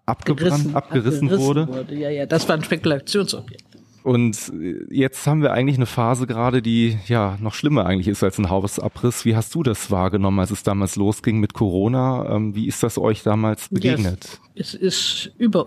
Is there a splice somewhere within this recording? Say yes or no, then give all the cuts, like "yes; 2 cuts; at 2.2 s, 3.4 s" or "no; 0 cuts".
no; 0 cuts